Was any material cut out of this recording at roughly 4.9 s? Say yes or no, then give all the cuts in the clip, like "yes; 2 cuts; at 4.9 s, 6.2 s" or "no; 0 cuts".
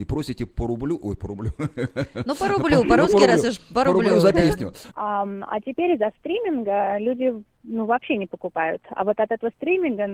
yes; 1 cut; at 4.9 s